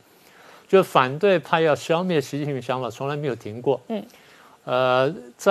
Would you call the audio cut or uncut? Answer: uncut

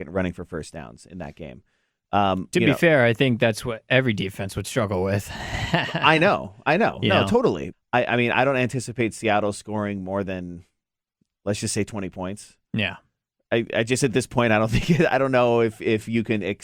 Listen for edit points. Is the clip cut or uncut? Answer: cut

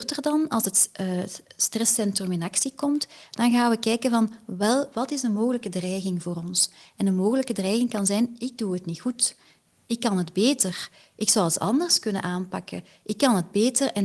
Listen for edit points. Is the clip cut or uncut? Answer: uncut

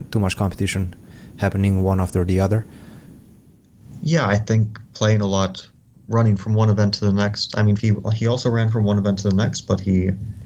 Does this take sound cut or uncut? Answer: cut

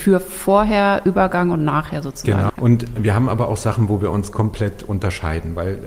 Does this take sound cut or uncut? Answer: cut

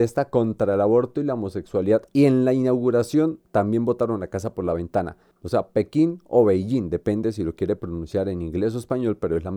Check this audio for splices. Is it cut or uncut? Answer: cut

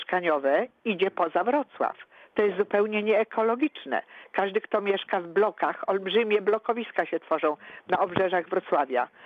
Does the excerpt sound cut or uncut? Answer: uncut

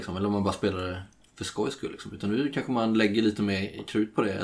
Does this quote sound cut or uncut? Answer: uncut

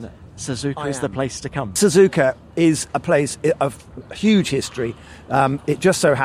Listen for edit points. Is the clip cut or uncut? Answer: uncut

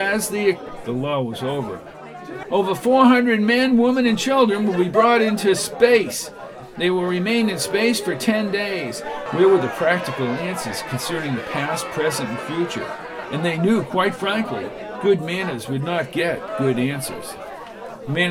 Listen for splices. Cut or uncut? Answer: cut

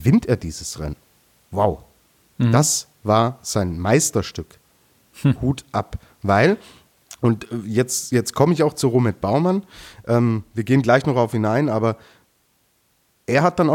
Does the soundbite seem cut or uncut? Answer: uncut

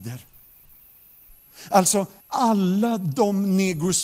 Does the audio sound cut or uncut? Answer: cut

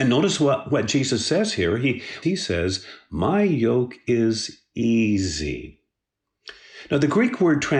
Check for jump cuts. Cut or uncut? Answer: cut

